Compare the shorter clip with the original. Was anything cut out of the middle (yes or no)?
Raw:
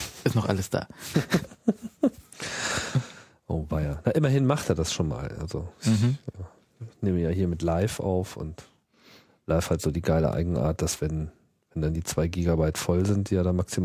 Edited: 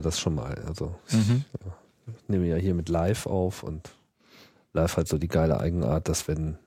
no